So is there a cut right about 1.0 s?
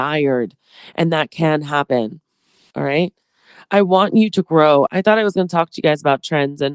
no; 2 cuts; at 2.7 s, 4.9 s

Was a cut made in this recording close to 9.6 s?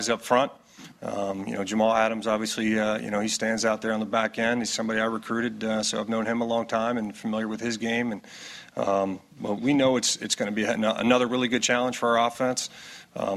yes; 1 cut; at 9.6 s

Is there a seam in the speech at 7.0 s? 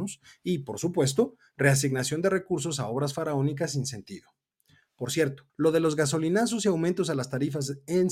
no; 1 cut; at 5.5 s

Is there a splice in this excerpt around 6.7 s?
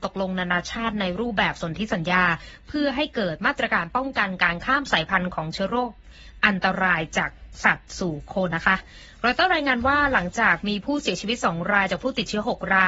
no; 1 cut; at 8.5 s

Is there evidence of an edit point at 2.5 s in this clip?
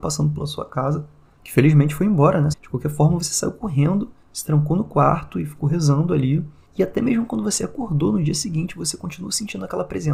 yes; 1 cut; at 2.5 s

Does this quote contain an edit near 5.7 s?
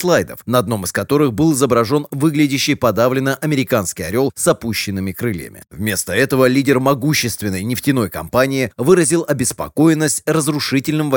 yes; 1 cut; at 5.7 s

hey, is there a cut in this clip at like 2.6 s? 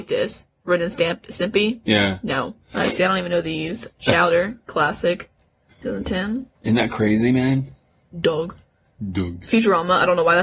yes; 2 cuts; at 2.6 s, 5.7 s

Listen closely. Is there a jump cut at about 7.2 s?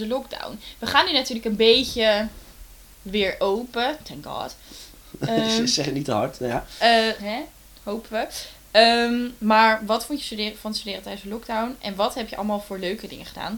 yes; 1 cut; at 7.2 s

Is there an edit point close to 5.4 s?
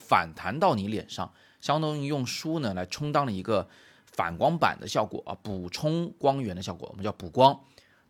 no; 0 cuts

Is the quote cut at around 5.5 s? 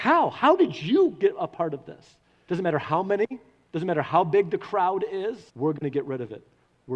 yes; 2 cuts; at 2.5 s, 5.5 s

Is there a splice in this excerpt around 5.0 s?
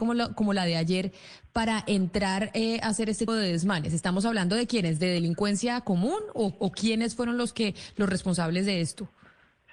no; 1 cut; at 3.3 s

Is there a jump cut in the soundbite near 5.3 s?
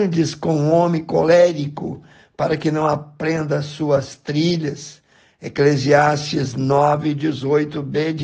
no; 0 cuts

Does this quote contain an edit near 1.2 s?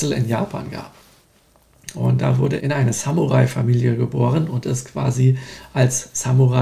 no; 1 cut; at 2.6 s

